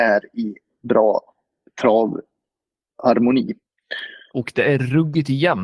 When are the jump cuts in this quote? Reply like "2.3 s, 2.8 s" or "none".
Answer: 4.3 s